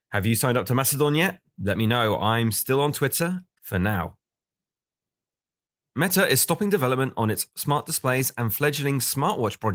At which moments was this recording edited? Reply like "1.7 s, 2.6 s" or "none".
3.6 s